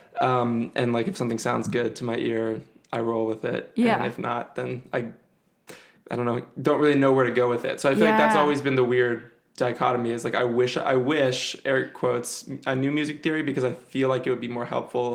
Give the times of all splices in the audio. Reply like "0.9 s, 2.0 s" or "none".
none